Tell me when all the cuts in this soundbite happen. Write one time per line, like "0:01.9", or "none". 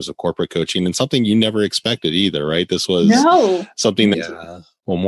0:04.1